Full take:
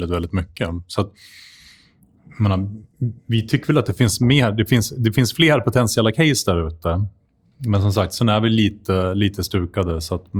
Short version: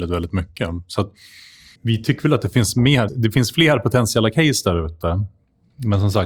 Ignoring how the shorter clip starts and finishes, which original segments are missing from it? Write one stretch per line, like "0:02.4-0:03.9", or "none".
0:01.8-0:03.2
0:04.5-0:04.9